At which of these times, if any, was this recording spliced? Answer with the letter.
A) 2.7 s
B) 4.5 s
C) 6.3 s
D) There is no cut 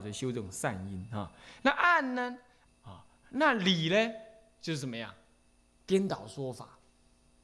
A